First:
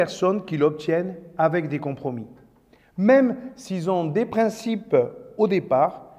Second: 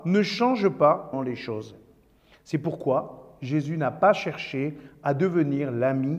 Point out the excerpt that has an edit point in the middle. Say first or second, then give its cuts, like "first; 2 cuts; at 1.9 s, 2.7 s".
second; 1 cut; at 1.1 s